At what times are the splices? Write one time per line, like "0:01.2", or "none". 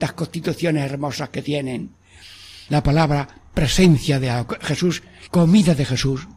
0:02.7
0:05.3